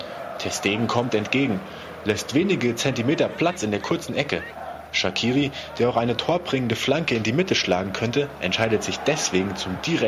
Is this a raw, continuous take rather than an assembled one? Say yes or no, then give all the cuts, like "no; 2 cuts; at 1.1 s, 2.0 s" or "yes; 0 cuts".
yes; 0 cuts